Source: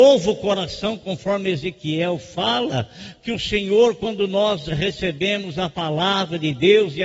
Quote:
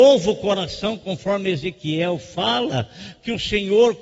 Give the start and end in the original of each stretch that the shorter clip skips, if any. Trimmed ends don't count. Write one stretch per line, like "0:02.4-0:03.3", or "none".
none